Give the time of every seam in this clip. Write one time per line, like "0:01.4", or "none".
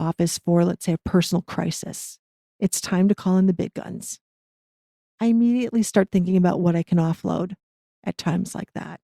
0:02.4